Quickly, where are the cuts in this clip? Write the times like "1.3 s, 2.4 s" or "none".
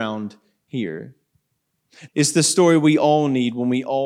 2.1 s